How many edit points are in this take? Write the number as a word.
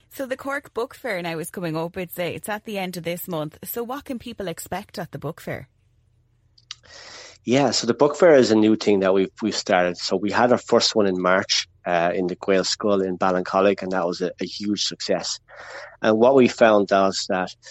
zero